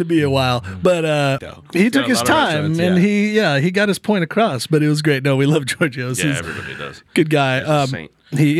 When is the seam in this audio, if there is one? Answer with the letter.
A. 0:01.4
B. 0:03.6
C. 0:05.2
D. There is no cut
A